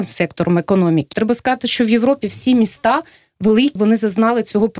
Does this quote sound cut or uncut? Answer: cut